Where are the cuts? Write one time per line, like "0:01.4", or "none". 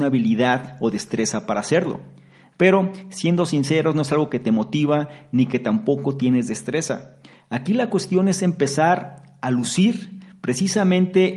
0:02.5